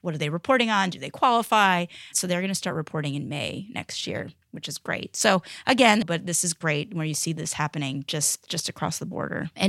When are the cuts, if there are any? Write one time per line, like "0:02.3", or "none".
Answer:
0:06.0